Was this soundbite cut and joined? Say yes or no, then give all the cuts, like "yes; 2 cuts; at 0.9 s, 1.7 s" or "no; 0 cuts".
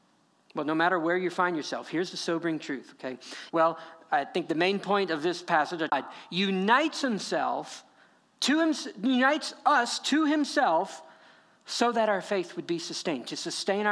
yes; 1 cut; at 3.5 s